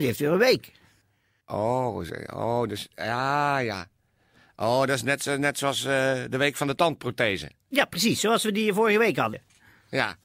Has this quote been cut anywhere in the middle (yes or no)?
no